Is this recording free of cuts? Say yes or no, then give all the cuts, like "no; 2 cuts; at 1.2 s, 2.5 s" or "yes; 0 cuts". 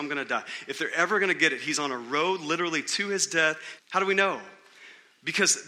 no; 1 cut; at 3.8 s